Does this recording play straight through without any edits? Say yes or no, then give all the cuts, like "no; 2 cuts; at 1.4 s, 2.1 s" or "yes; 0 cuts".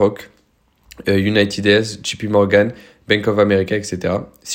yes; 0 cuts